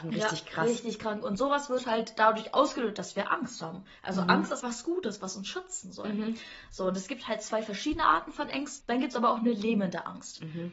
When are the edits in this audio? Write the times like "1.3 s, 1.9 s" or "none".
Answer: 4.6 s, 8.8 s